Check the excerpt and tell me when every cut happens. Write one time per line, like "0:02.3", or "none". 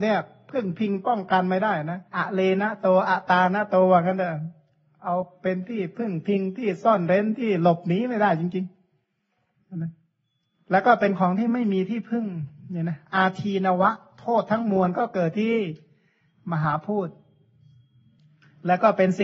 0:02.1